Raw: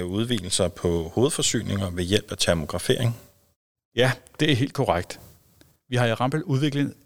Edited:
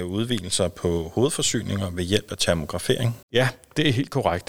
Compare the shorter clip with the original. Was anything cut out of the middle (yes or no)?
yes